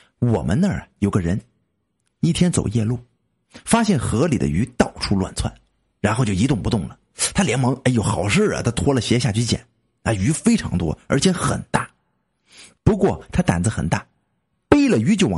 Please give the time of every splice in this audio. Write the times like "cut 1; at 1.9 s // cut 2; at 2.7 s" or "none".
cut 1; at 12.7 s